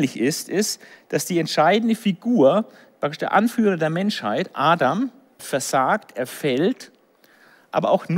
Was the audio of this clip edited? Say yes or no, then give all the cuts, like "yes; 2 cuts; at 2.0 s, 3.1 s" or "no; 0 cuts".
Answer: yes; 1 cut; at 5.4 s